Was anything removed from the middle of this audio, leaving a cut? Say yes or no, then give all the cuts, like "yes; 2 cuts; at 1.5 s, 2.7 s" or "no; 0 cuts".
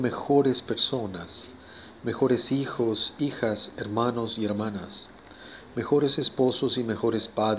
no; 0 cuts